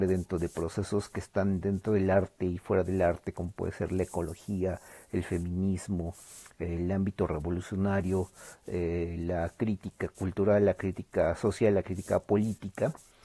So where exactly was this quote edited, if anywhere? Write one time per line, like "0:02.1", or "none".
none